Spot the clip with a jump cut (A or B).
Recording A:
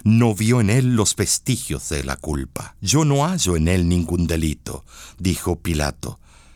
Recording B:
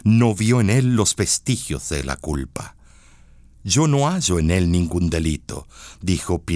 A